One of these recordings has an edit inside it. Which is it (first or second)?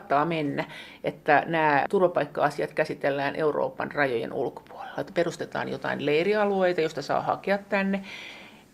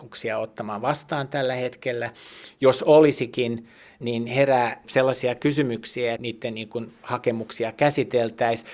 second